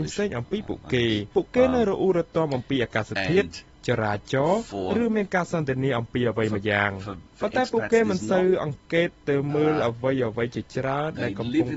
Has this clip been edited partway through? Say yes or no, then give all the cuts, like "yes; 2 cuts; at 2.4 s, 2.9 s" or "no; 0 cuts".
yes; 2 cuts; at 1.3 s, 7.3 s